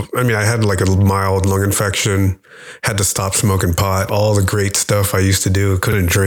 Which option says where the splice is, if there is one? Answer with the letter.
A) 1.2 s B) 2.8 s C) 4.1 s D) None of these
C